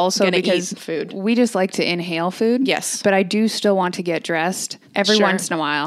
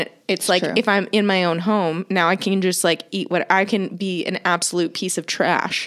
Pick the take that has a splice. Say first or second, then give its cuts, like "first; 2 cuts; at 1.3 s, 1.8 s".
first; 1 cut; at 4.9 s